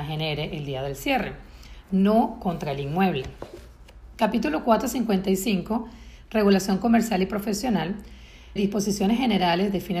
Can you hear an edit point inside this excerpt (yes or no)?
yes